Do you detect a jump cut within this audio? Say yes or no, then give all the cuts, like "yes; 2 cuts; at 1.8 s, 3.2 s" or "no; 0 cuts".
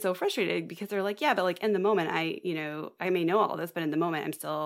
no; 0 cuts